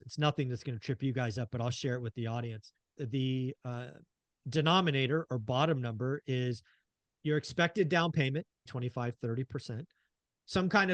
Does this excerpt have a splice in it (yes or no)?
yes